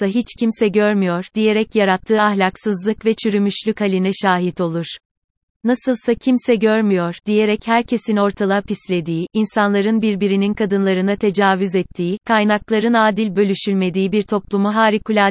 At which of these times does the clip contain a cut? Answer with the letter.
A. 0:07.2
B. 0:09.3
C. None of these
C